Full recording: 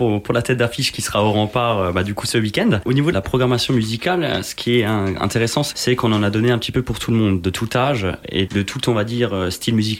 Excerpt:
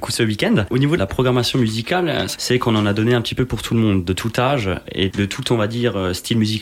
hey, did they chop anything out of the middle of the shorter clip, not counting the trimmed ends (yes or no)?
yes